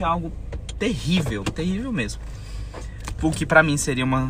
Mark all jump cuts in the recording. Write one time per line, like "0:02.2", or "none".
0:03.2